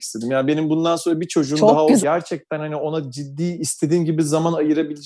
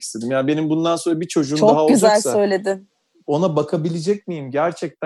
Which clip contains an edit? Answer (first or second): first